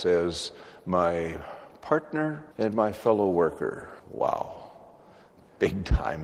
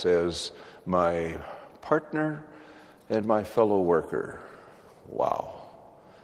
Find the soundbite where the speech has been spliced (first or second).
first